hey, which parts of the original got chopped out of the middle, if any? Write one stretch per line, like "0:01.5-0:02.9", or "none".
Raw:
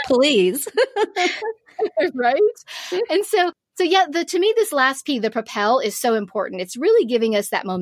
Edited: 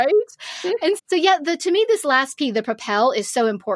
0:03.3-0:03.7